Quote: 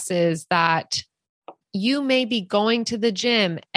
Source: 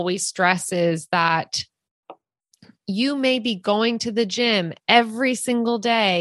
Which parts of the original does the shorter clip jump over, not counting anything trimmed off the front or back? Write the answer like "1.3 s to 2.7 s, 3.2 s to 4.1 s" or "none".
2.2 s to 2.7 s